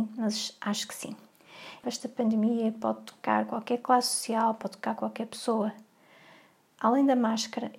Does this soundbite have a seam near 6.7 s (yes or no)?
no